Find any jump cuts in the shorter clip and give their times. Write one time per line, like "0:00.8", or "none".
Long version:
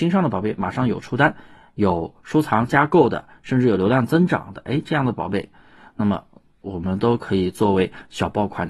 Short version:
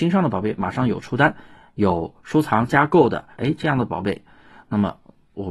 0:03.3